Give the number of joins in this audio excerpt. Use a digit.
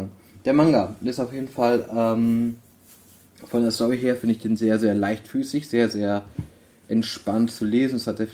0